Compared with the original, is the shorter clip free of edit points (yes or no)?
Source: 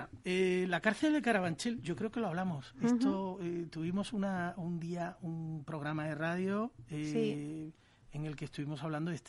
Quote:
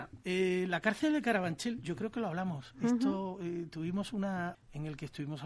no